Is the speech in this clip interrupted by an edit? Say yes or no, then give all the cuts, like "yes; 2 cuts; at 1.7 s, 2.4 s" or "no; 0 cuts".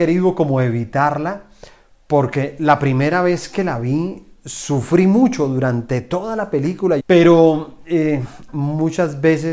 yes; 2 cuts; at 7.0 s, 8.5 s